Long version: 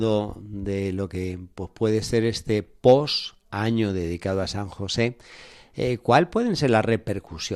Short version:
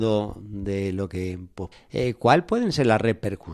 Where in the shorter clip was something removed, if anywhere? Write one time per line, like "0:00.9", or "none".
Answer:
0:01.7